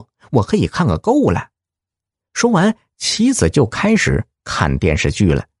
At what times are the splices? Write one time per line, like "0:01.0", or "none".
none